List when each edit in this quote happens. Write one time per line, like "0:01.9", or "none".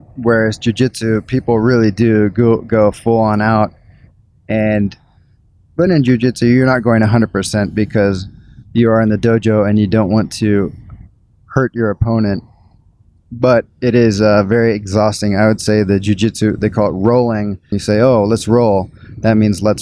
0:05.9
0:17.7